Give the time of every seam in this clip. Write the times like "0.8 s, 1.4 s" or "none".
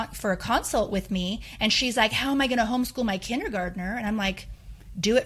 none